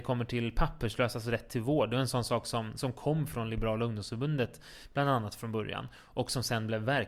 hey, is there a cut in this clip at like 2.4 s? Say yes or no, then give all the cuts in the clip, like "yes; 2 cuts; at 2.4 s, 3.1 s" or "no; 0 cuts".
no; 0 cuts